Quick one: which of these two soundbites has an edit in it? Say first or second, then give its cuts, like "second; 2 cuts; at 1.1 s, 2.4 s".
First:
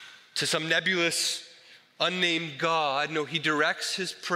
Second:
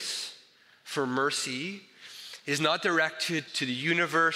second; 1 cut; at 3.5 s